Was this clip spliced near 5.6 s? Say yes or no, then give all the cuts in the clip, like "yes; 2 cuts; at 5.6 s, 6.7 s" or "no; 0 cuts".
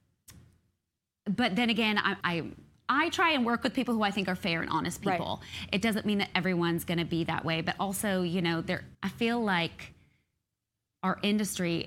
no; 2 cuts; at 2.2 s, 8.9 s